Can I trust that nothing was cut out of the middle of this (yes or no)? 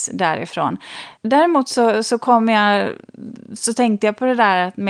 no